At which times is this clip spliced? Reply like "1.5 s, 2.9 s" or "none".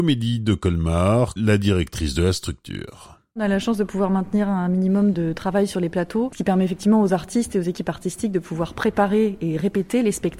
1.4 s